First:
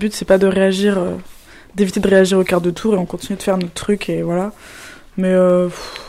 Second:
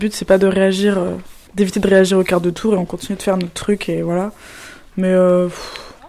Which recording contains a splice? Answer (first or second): second